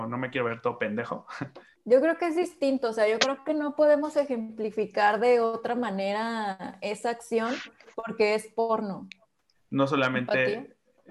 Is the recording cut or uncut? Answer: cut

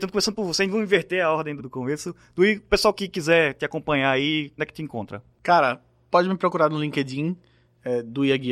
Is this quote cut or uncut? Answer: cut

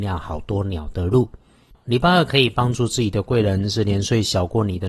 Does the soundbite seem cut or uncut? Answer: uncut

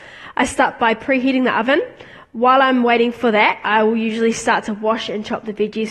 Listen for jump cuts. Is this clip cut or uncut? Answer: uncut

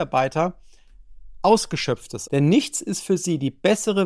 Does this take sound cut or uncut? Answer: cut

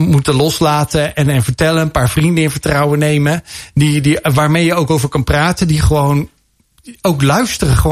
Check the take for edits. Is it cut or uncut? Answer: uncut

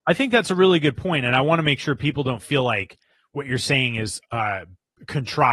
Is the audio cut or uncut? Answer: uncut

